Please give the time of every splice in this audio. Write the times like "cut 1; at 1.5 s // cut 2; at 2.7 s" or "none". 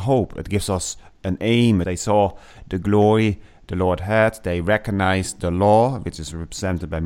cut 1; at 1.8 s